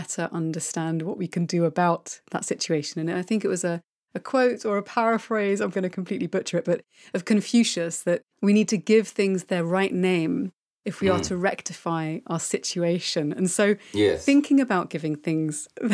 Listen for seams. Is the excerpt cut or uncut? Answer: cut